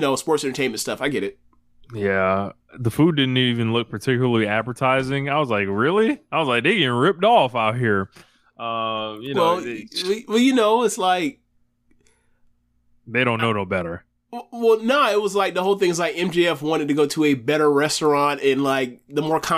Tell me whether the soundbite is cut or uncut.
uncut